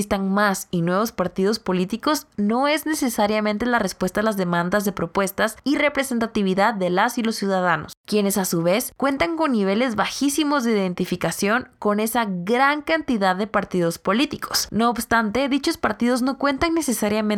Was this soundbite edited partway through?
yes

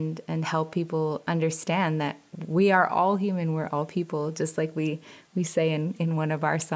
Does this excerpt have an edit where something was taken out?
no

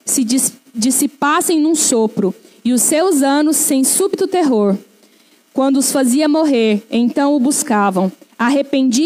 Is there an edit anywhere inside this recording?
no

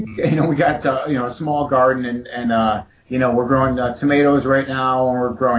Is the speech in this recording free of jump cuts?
yes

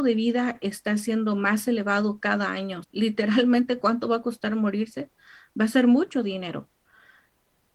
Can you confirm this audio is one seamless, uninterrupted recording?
no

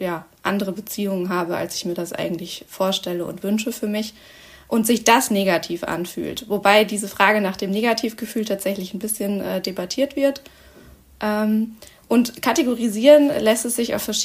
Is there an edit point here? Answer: no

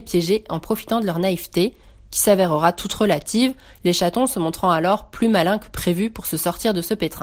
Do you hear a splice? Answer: no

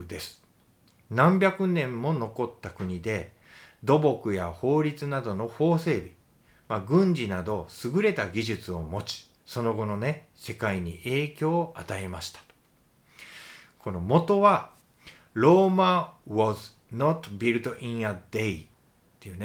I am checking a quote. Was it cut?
yes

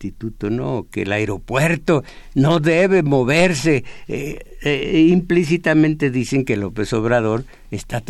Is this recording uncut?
yes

